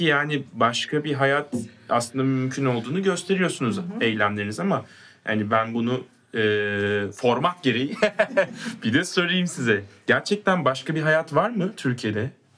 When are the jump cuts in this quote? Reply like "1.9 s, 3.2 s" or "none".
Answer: none